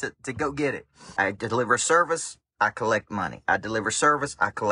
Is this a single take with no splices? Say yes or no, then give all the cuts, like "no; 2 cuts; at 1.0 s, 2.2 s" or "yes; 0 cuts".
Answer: no; 1 cut; at 1.2 s